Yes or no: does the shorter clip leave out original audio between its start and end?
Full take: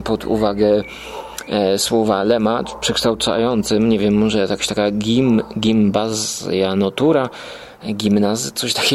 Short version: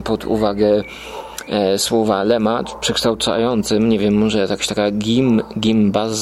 no